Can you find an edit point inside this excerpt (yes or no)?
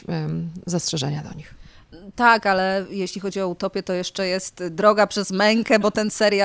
no